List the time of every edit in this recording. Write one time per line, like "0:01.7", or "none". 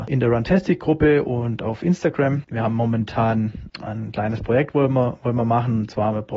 0:03.7